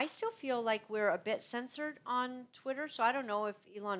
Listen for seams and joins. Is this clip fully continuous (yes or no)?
yes